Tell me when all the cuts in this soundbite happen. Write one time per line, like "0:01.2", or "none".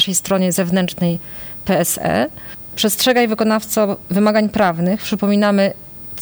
0:02.7